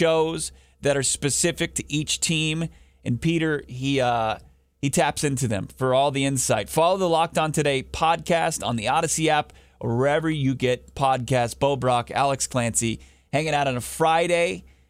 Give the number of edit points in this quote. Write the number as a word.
zero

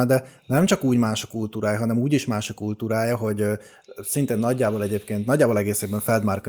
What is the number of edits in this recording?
zero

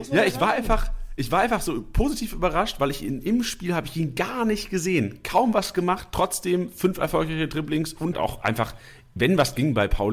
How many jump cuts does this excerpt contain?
one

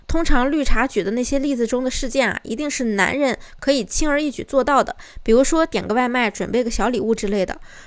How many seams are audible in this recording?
zero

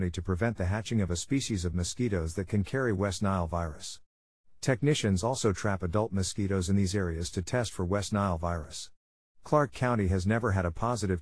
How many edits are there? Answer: zero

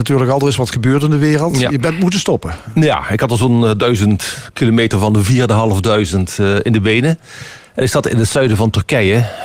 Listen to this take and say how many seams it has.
zero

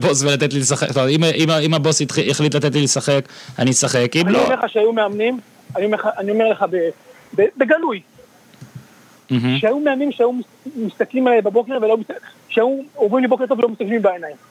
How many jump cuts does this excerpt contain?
one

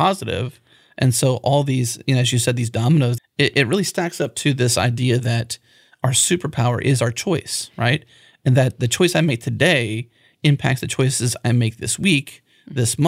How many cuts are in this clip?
one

